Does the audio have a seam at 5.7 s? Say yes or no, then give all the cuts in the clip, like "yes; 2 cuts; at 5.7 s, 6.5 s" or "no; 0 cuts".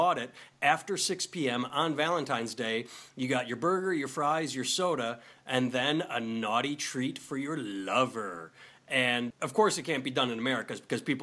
no; 1 cut; at 9.3 s